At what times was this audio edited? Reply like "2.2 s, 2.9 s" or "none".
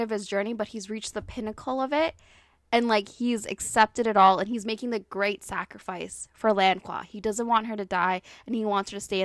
none